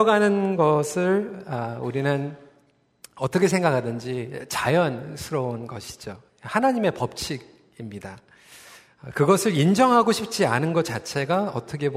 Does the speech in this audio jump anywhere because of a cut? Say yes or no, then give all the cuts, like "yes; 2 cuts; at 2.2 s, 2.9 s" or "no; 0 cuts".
no; 0 cuts